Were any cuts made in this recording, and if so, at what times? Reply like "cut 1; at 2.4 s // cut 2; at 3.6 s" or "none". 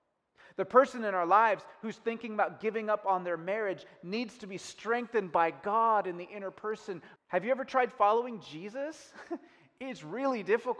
cut 1; at 7.2 s

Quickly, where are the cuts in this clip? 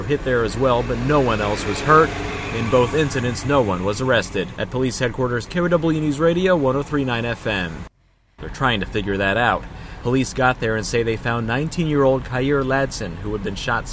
cut 1; at 5.5 s // cut 2; at 8.4 s // cut 3; at 10.0 s

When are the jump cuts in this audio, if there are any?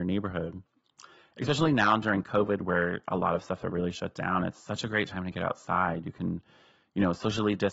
none

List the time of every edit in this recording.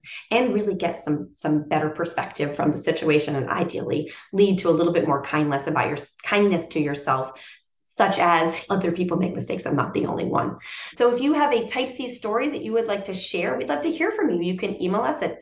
cut 1; at 8.7 s // cut 2; at 10.9 s

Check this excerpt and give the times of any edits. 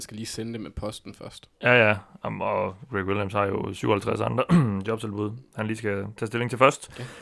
none

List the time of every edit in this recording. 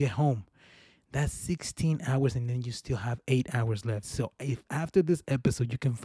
cut 1; at 4.0 s

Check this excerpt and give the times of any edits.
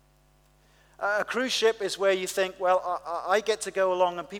none

